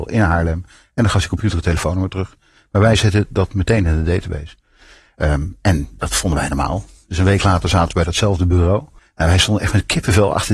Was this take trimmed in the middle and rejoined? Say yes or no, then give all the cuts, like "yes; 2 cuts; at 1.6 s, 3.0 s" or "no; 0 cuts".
yes; 1 cut; at 9.0 s